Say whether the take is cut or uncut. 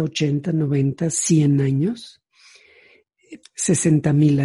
cut